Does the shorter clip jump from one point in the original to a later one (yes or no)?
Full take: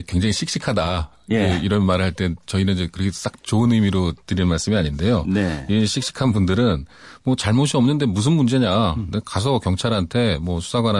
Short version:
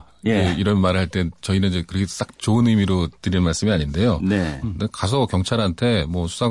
yes